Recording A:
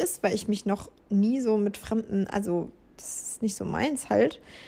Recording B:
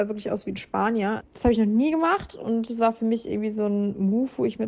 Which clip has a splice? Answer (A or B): B